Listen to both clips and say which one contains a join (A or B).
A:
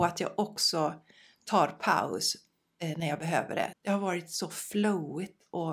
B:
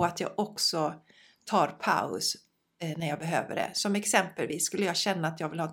A